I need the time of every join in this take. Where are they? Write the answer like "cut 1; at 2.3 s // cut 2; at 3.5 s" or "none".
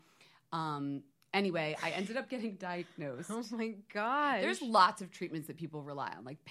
none

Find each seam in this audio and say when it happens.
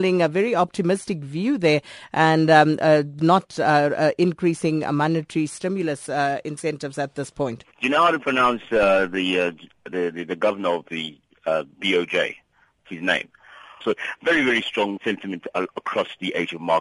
cut 1; at 7.7 s // cut 2; at 13.8 s // cut 3; at 15.0 s

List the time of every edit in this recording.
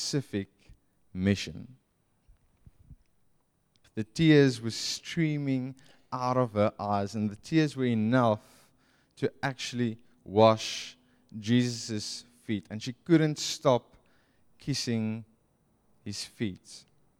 cut 1; at 3.8 s

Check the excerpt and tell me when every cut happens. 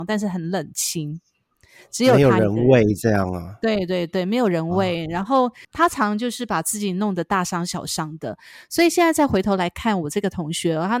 cut 1; at 5.6 s

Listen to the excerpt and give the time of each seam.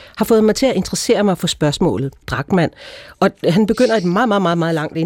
cut 1; at 2.2 s

